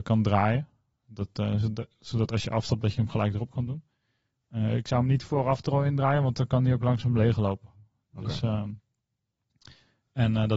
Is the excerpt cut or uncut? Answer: uncut